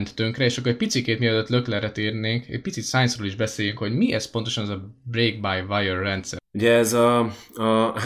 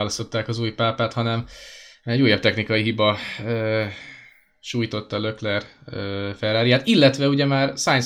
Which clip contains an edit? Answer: first; 1 cut; at 6.4 s

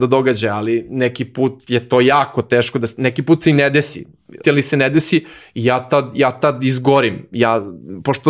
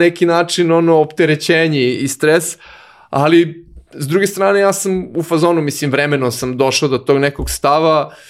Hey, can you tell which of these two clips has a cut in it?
first; 1 cut; at 4.4 s

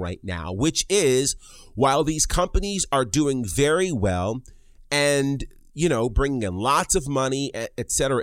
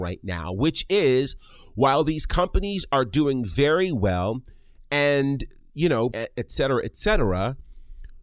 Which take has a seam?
second; 1 cut; at 6.1 s

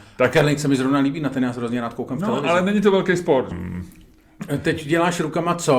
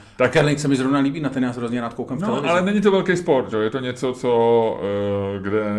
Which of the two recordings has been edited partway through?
first; 1 cut; at 3.5 s

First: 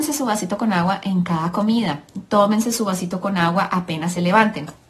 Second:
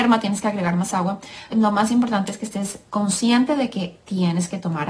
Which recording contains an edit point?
second; 2 cuts; at 1.5 s, 2.9 s

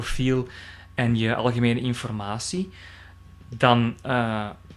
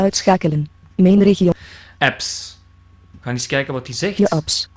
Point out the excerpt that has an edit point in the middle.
second; 2 cuts; at 2.0 s, 3.2 s

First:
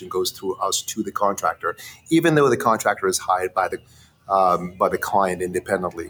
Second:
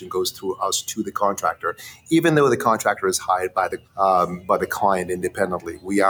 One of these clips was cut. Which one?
second; 1 cut; at 3.9 s

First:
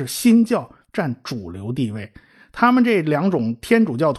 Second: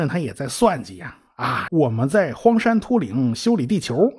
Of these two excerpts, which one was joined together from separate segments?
second; 1 cut; at 1.7 s

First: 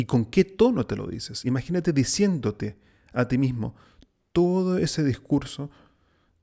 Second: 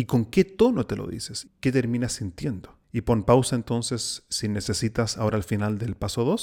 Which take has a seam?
second; 2 cuts; at 1.4 s, 2.8 s

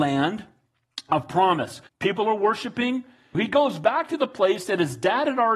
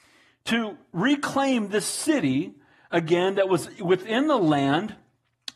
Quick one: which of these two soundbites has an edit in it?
first; 2 cuts; at 1.9 s, 3.3 s

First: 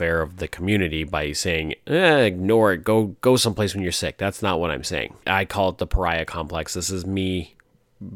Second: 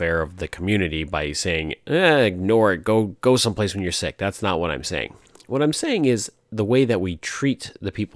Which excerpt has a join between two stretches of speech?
first; 1 cut; at 5.2 s

